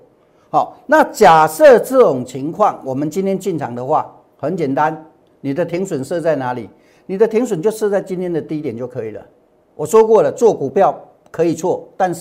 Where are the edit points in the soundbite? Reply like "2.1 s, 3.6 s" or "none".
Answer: none